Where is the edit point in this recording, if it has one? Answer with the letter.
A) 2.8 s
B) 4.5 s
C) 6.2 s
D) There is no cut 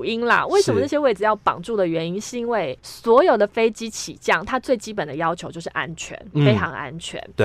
A